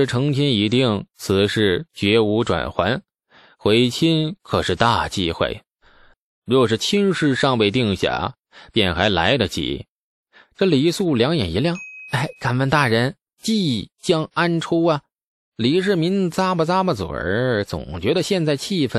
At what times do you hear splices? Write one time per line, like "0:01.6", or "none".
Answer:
0:06.1